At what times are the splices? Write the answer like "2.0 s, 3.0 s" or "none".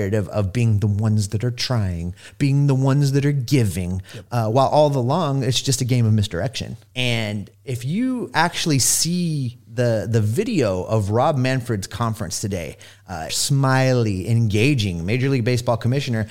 6.9 s, 13.3 s